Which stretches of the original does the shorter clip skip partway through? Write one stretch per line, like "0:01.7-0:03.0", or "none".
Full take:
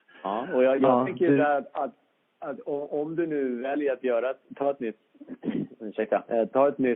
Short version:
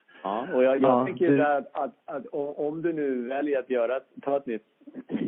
0:02.0-0:02.3